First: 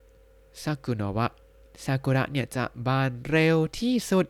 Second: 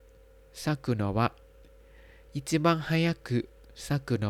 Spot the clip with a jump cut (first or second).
first